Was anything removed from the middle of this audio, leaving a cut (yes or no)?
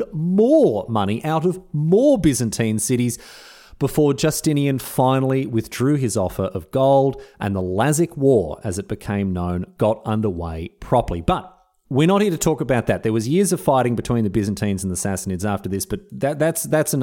no